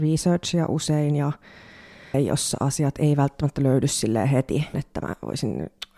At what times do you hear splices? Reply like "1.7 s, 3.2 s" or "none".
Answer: 2.1 s, 4.7 s